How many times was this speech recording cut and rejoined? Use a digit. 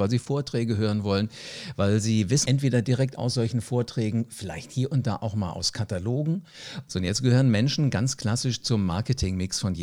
2